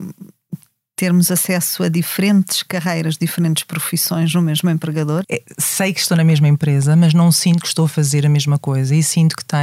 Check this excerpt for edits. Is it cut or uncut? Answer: cut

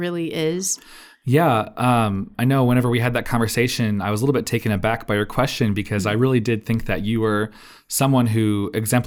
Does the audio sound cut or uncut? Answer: uncut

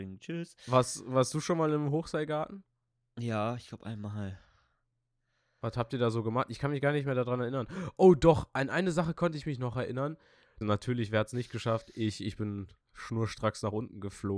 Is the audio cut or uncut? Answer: cut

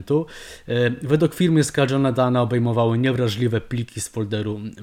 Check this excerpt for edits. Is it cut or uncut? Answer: uncut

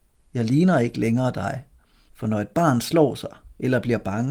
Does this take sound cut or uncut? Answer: cut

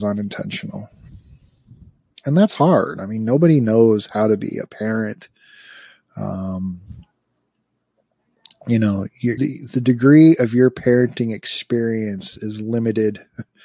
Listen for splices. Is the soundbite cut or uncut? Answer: cut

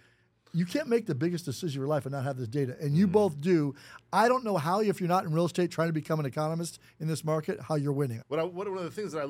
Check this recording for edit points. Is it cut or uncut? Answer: cut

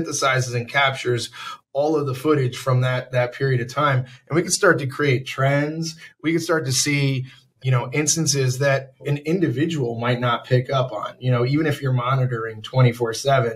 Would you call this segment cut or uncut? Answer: uncut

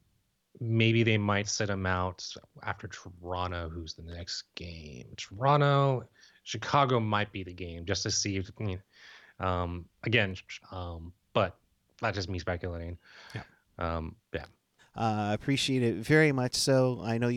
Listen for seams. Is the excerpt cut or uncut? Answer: cut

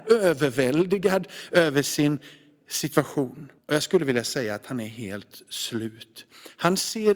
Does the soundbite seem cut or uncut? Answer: cut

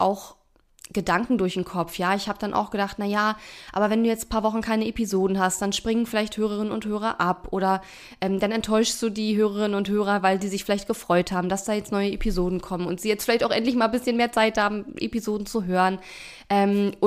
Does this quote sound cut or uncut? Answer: uncut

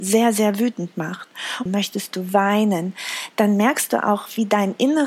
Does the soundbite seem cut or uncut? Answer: cut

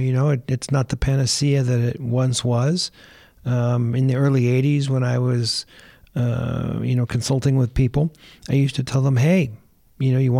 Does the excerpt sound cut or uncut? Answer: uncut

